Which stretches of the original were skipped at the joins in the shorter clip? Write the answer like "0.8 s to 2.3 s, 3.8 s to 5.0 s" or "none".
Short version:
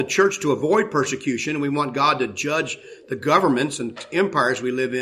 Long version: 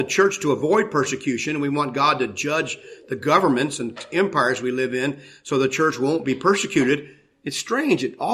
none